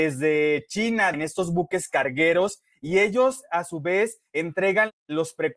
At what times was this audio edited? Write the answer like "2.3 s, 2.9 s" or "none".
1.1 s